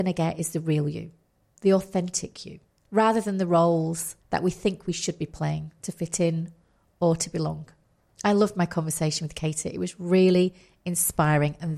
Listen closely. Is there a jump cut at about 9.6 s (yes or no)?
no